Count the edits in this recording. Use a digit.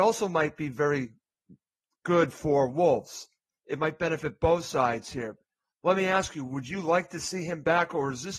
0